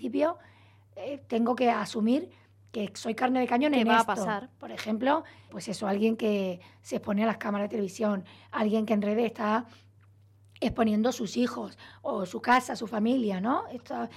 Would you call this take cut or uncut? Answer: cut